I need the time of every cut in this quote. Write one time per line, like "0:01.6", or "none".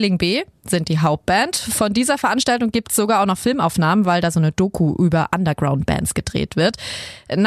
none